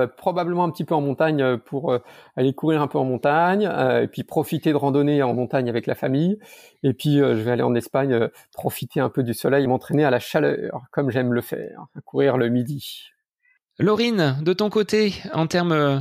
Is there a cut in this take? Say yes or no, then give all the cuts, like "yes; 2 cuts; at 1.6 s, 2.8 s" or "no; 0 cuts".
no; 0 cuts